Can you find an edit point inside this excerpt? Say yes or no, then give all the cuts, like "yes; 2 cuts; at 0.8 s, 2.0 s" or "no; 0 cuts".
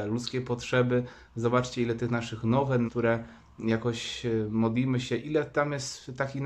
yes; 1 cut; at 2.9 s